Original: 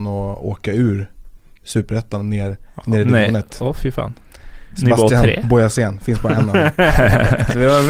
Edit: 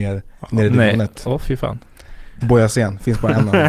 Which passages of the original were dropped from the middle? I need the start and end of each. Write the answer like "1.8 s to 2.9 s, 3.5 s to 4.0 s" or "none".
4.8 s to 5.4 s